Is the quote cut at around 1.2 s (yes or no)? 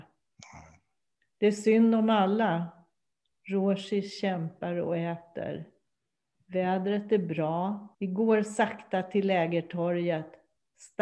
no